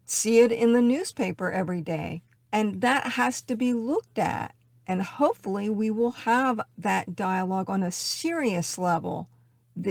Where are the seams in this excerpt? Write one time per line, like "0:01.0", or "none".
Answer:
0:02.4